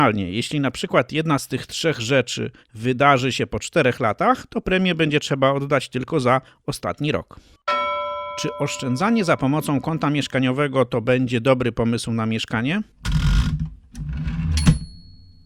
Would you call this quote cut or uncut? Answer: cut